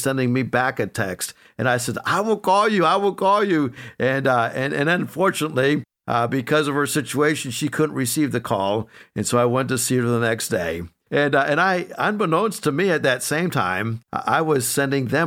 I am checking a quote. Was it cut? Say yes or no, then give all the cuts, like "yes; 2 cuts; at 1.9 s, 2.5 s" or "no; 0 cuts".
yes; 1 cut; at 11.1 s